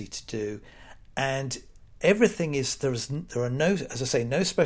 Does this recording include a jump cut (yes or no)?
no